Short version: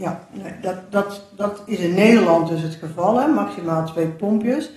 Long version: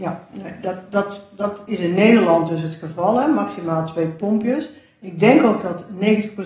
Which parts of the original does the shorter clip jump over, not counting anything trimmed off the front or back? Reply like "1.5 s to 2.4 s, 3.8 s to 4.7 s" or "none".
none